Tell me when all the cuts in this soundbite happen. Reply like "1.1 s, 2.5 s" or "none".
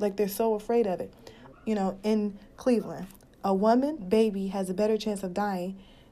1.5 s, 4.0 s

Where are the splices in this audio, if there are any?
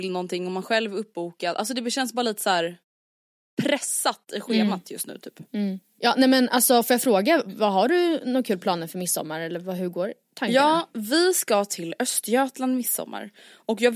none

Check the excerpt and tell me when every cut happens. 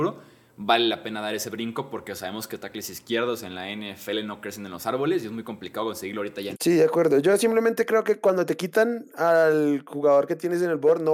6.5 s

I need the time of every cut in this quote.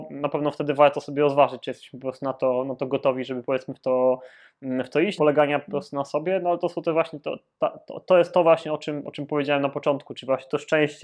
5.2 s

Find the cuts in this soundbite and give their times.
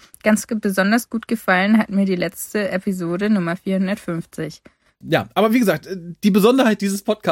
5.0 s

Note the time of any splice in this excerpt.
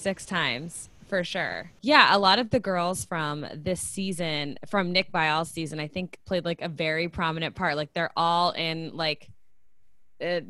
none

